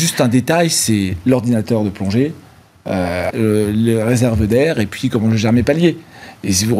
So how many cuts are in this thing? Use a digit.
1